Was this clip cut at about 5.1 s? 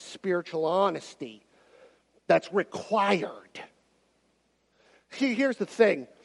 no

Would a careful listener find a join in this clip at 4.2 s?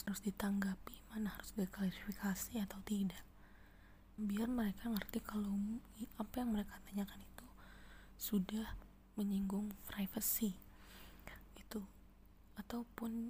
yes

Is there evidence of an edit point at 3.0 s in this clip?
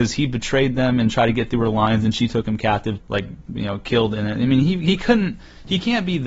yes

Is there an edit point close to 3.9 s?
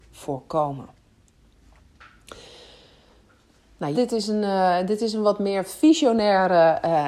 yes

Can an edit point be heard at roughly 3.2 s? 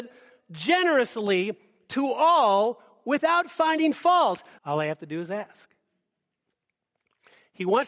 no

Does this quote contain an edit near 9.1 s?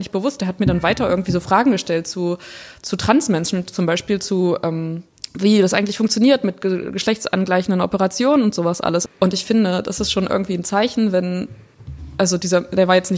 yes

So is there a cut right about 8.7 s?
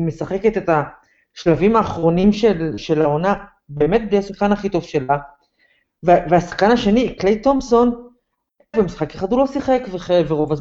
yes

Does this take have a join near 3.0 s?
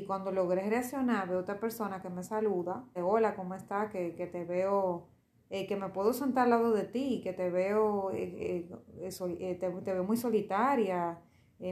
yes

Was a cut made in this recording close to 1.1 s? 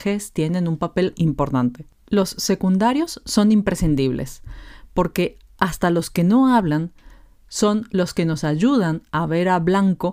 yes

